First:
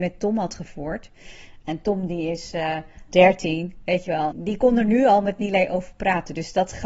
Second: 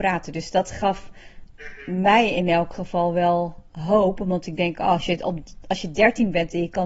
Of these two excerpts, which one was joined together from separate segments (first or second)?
first